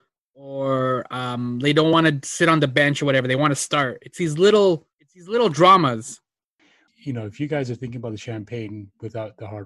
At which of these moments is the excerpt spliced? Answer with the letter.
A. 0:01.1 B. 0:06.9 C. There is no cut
B